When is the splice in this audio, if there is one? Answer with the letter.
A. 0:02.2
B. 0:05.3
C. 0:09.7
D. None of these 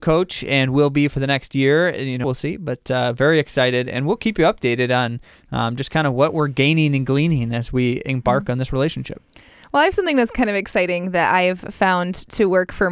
A